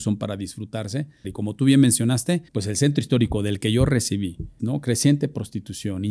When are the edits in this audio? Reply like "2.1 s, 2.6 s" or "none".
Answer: 1.2 s, 2.5 s, 4.6 s